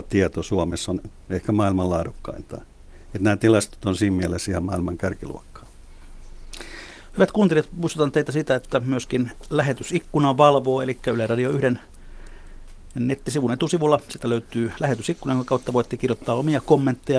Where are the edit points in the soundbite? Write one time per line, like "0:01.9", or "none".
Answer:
none

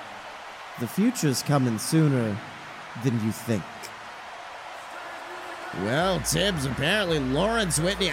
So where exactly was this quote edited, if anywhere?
none

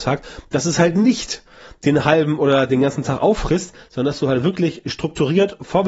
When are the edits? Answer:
none

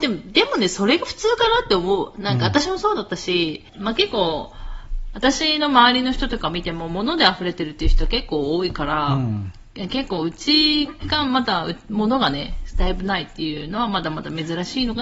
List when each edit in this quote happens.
0:03.7

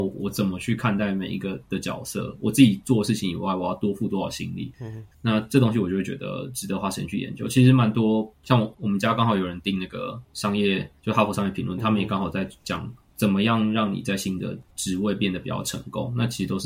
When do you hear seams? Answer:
0:05.1

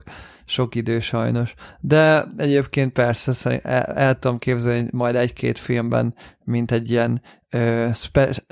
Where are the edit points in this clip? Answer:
none

